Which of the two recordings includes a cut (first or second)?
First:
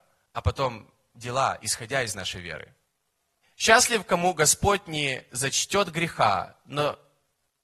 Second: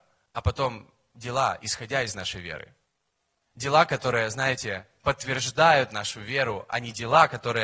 first